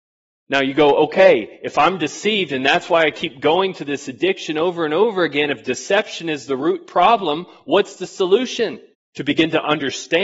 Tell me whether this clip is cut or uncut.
cut